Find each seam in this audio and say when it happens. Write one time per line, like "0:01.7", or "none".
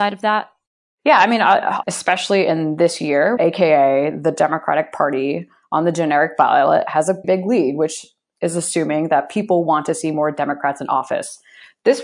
0:01.8
0:03.4
0:07.2